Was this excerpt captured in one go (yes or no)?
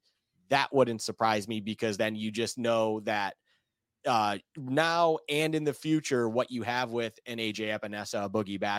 yes